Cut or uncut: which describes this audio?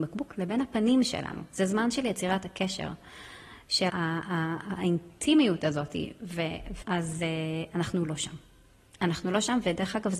cut